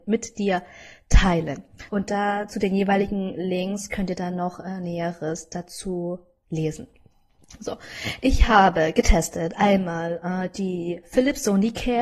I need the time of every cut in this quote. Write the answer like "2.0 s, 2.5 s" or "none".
1.9 s